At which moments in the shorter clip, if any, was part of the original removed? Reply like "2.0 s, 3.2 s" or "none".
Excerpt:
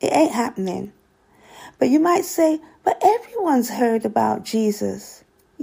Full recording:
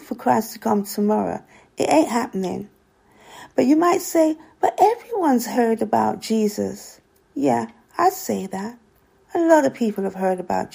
none